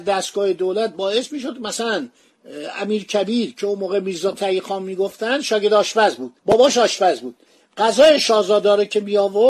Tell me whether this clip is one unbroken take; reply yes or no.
no